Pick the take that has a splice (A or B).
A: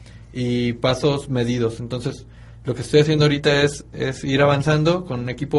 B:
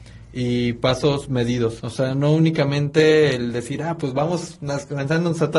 B